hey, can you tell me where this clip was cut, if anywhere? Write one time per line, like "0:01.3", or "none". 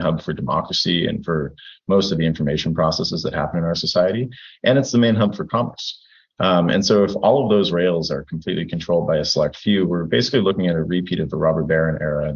none